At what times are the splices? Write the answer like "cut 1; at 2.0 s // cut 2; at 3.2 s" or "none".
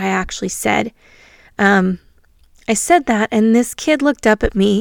none

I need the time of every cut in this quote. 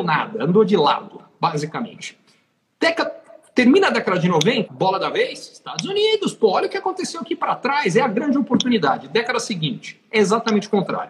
cut 1; at 4.7 s

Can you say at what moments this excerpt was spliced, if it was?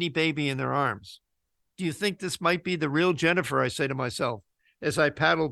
cut 1; at 1.6 s

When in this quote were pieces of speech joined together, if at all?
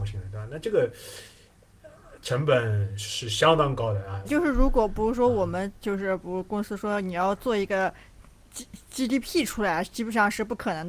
cut 1; at 4.2 s

